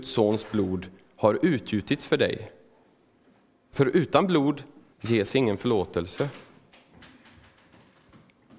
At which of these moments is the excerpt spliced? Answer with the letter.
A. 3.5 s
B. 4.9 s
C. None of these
B